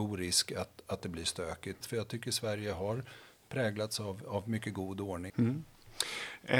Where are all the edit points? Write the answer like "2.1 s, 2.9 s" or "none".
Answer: 1.8 s, 5.3 s